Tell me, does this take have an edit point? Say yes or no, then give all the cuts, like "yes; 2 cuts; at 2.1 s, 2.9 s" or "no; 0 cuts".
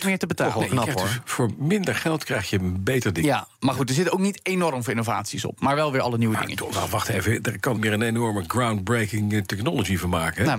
yes; 1 cut; at 7.8 s